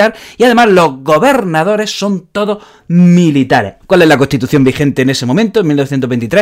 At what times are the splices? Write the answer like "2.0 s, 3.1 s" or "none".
3.8 s